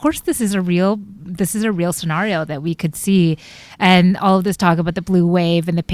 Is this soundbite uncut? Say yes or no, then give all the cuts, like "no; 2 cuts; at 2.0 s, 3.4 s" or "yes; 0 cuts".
yes; 0 cuts